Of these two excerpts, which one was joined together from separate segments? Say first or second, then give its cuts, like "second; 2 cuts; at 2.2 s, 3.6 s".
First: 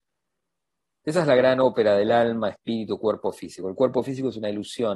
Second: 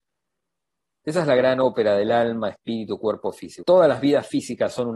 second; 1 cut; at 3.6 s